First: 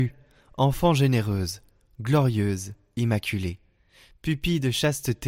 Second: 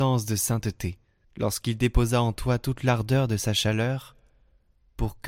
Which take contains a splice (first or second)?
second